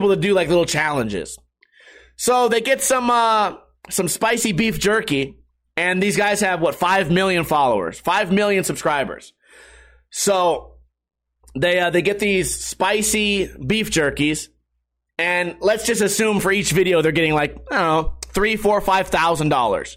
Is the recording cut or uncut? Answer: uncut